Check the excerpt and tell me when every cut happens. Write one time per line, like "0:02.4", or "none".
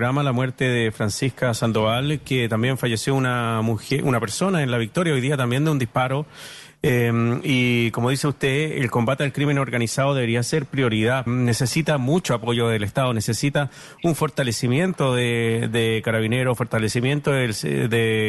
0:11.3
0:16.6

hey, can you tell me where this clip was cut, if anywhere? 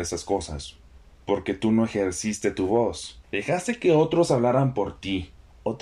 0:01.1
0:03.2

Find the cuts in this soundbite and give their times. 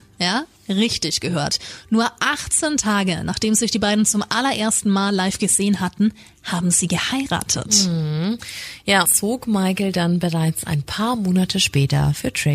0:09.0

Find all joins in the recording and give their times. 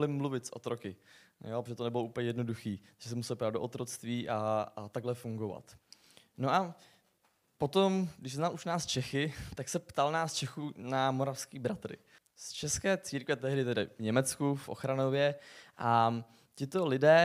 0:12.2

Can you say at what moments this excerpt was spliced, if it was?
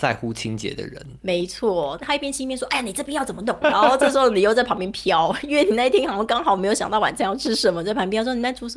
0:02.0
0:03.6

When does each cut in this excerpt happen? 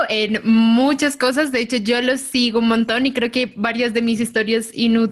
none

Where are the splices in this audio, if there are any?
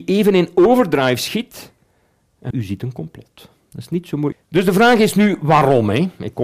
0:02.5
0:04.3

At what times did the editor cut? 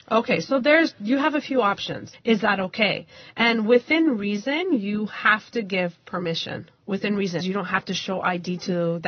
0:02.1
0:07.4

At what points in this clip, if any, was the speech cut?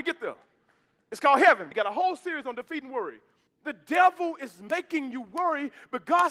0:01.7
0:03.5

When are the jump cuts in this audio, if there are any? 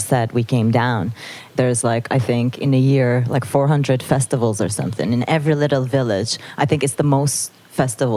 0:01.5

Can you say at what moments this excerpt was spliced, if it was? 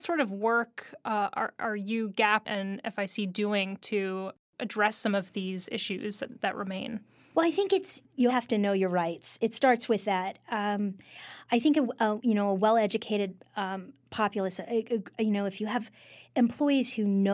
0:08.3

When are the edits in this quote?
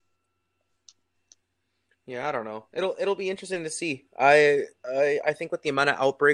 none

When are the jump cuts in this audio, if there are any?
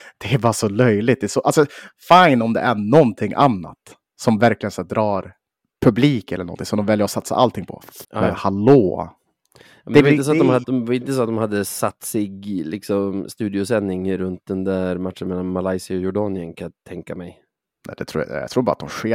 0:08.0
0:10.6

